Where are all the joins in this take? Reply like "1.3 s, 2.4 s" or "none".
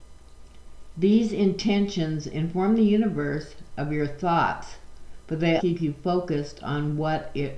5.6 s